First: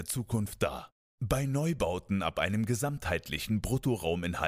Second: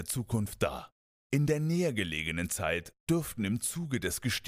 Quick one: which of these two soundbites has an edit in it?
first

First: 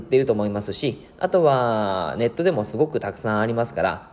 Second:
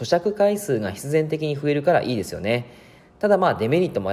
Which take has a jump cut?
second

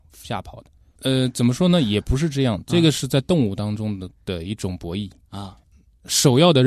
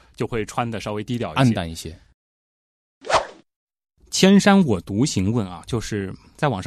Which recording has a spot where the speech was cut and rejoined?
first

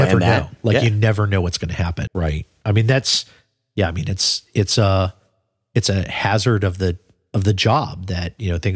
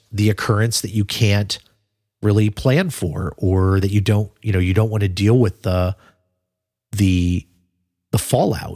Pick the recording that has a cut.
first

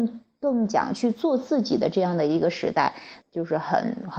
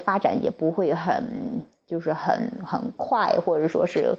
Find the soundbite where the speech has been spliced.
first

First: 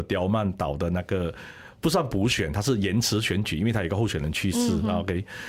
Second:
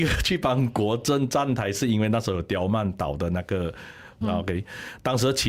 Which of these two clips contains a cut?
second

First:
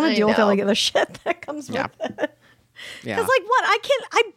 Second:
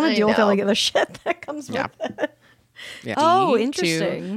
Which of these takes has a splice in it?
second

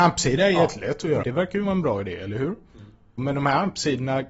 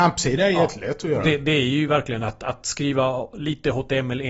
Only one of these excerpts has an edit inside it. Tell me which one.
first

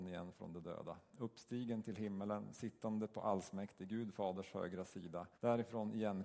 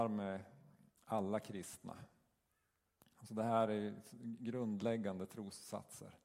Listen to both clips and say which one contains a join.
first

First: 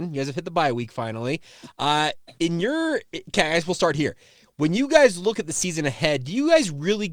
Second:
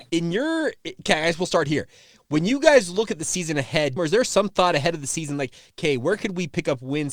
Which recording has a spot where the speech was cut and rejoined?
second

